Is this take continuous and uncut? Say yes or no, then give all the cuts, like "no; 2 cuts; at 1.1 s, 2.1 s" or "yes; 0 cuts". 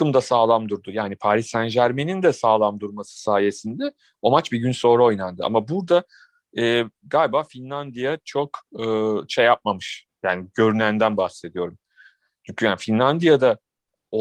yes; 0 cuts